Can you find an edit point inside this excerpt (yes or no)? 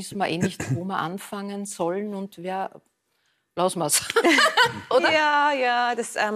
no